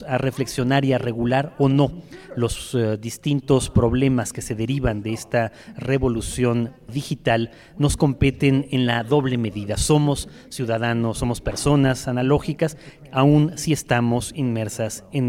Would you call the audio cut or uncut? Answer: uncut